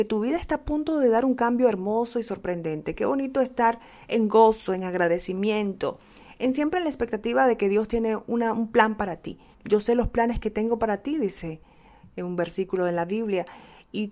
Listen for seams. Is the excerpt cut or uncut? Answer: cut